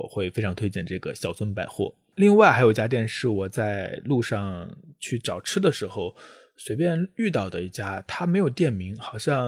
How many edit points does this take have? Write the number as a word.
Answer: zero